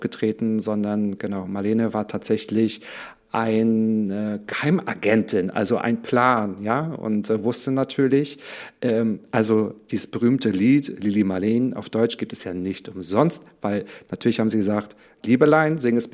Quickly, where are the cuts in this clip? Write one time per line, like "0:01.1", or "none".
none